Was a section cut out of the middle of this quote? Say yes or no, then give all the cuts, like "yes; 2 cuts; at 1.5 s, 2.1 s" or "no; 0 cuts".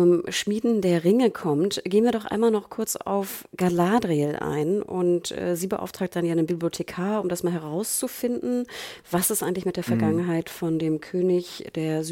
no; 0 cuts